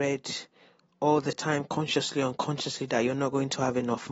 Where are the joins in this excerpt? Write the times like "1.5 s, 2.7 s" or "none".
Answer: none